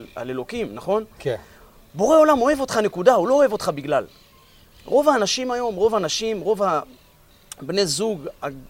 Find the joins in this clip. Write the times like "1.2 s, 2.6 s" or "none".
none